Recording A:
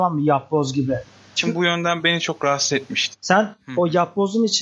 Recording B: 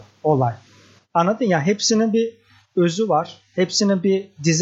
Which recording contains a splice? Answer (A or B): A